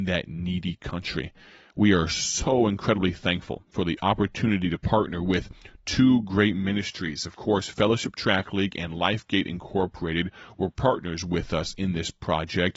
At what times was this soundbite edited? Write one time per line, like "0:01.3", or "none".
none